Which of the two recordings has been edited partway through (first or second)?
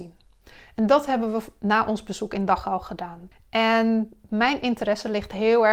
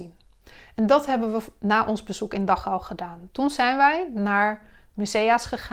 first